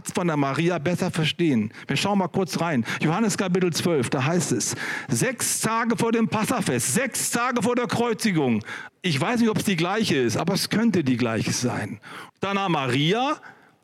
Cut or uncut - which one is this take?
cut